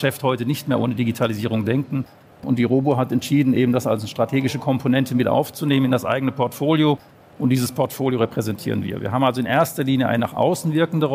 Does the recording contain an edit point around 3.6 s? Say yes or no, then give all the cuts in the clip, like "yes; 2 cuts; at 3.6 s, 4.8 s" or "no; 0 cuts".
no; 0 cuts